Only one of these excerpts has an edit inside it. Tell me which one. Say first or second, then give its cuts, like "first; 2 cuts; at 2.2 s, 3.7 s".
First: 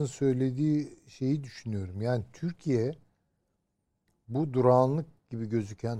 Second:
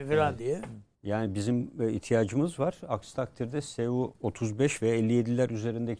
second; 1 cut; at 0.9 s